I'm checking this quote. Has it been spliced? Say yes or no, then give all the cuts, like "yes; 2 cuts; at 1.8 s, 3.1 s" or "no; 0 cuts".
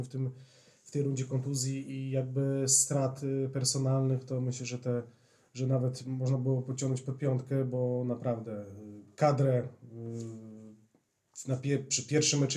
no; 0 cuts